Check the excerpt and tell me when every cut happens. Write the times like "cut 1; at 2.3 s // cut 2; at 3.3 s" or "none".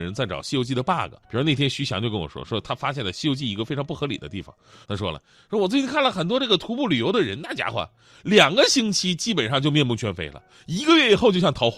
cut 1; at 1.2 s // cut 2; at 4.8 s